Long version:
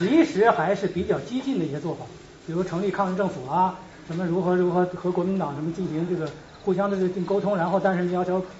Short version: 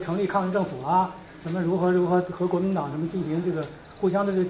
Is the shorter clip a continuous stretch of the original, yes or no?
yes